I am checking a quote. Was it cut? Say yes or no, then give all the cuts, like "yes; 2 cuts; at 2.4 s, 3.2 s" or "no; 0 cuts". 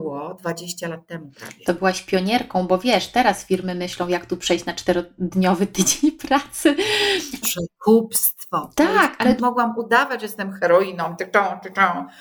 yes; 2 cuts; at 7.4 s, 9.4 s